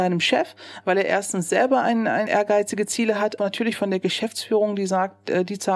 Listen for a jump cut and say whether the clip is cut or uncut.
cut